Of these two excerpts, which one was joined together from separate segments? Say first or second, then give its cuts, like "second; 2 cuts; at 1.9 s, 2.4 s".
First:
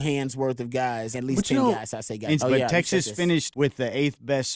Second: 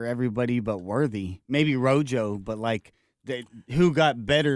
first; 3 cuts; at 1.1 s, 2.4 s, 3.5 s